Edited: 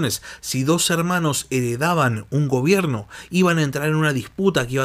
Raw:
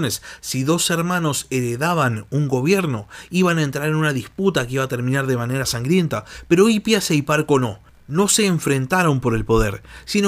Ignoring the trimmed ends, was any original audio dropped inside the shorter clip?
no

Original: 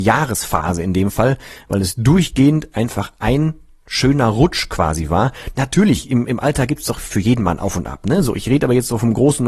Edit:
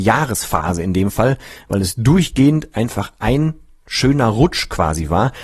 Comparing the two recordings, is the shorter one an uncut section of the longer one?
yes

